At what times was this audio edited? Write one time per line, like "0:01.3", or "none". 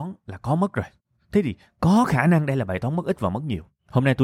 none